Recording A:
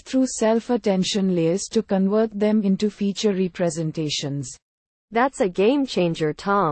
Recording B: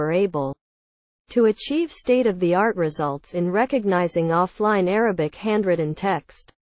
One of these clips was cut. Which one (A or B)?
A